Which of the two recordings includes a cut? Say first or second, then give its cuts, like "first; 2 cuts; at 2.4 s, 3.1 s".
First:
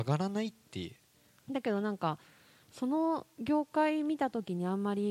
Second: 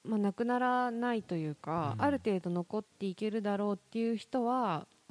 first; 1 cut; at 1.4 s